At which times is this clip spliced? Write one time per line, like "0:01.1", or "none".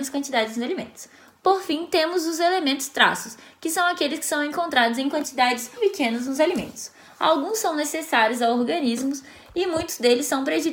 0:05.8